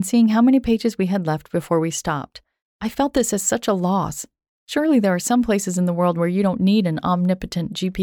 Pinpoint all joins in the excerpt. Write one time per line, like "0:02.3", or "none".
0:02.6